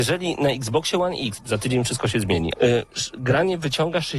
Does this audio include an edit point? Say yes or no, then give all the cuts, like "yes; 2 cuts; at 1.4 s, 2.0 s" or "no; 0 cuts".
yes; 2 cuts; at 1.4 s, 2.5 s